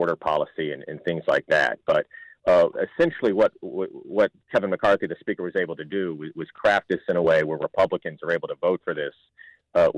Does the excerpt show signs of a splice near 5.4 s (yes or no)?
no